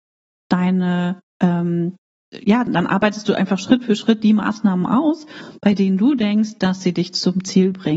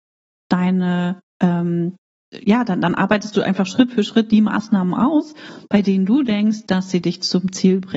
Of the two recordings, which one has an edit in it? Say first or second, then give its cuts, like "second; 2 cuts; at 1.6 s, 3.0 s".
first; 1 cut; at 2.7 s